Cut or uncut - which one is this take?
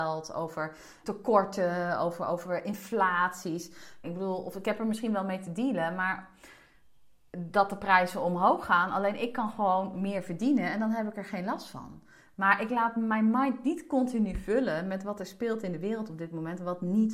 cut